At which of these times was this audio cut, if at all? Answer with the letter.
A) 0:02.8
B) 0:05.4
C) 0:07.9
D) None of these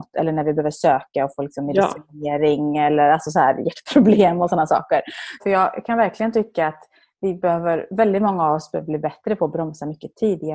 B